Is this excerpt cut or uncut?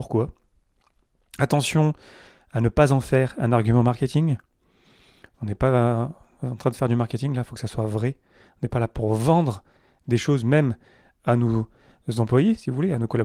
uncut